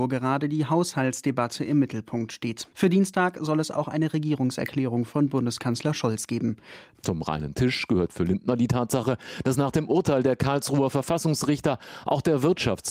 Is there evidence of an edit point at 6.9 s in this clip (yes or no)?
yes